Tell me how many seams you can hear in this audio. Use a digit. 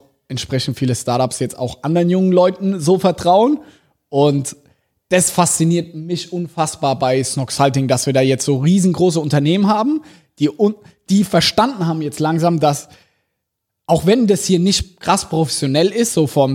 0